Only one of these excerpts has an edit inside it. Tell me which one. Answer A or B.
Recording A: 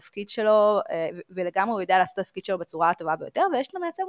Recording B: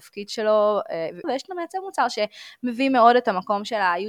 B